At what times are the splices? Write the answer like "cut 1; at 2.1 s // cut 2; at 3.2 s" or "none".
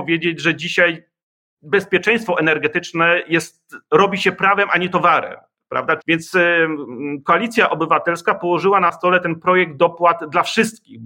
cut 1; at 6.0 s